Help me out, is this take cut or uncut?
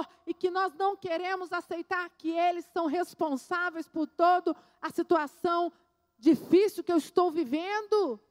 uncut